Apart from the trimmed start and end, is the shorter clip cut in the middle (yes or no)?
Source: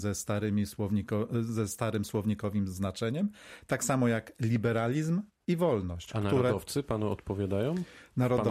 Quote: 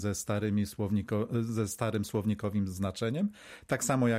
no